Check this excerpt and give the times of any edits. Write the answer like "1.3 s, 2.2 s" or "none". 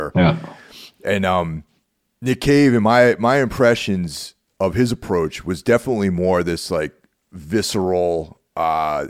none